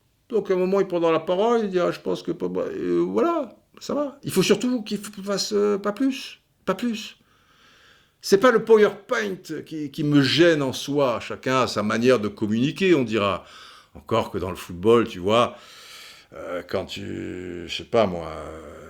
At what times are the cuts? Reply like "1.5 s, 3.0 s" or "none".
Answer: none